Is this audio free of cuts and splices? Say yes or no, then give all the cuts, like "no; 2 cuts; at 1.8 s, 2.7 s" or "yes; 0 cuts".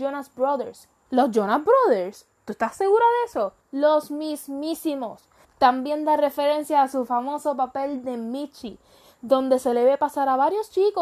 no; 3 cuts; at 1.1 s, 3.6 s, 5.4 s